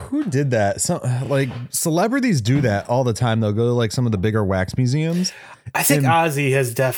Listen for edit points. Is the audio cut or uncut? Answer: uncut